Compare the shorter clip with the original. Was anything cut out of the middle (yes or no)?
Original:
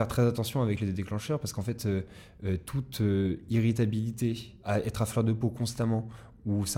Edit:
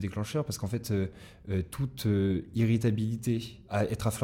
no